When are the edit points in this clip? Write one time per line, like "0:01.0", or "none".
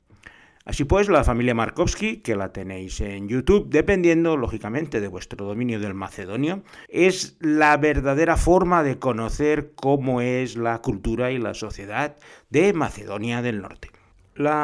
0:06.9